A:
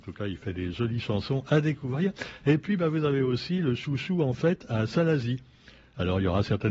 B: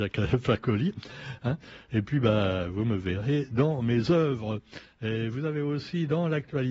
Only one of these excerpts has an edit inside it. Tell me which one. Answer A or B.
B